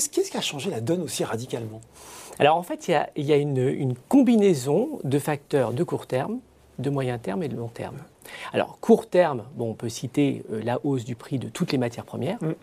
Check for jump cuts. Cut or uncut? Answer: uncut